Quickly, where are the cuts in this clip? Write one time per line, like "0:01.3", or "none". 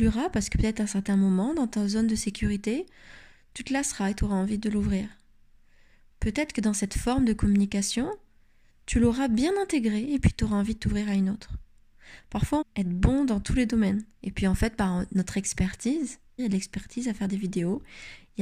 0:12.6
0:14.1
0:16.4